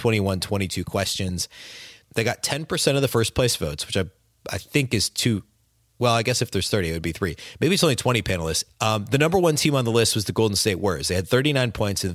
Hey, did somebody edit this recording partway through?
yes; 2 cuts; at 2.0 s, 8.7 s

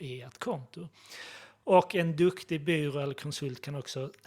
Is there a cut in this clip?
no; 0 cuts

